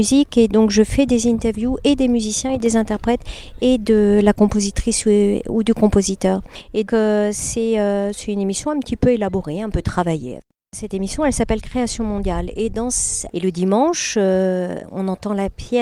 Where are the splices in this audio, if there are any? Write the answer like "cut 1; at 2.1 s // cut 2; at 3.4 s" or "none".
cut 1; at 6.9 s // cut 2; at 13.3 s